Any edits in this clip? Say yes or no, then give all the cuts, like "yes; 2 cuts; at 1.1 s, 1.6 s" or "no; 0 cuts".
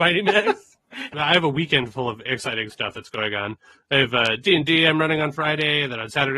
yes; 2 cuts; at 1.1 s, 2.3 s